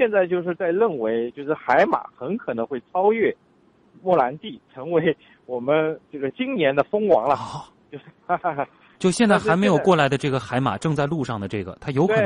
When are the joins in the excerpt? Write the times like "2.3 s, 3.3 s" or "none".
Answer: 6.0 s